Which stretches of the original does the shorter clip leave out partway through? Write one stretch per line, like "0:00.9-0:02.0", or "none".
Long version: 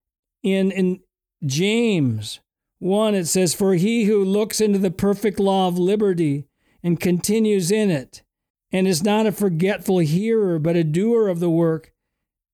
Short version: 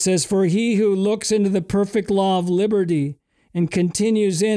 none